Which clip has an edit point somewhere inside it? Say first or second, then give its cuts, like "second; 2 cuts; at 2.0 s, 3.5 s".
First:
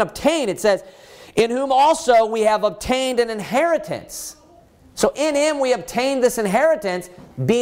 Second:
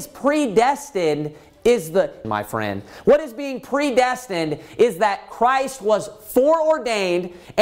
second; 1 cut; at 2.2 s